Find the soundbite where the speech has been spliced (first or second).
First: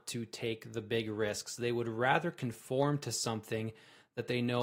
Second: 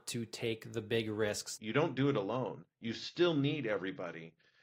second